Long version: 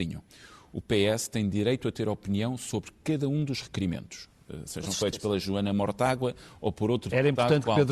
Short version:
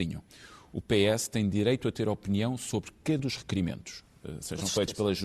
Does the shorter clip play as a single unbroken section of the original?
no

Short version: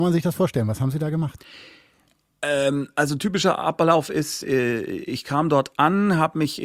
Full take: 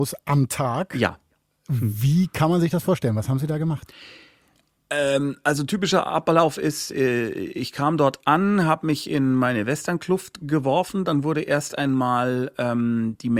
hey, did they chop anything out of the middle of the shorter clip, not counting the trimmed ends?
no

